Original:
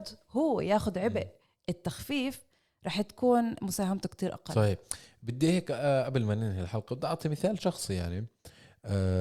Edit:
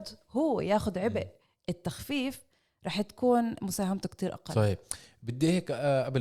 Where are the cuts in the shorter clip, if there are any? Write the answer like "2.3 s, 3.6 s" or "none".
none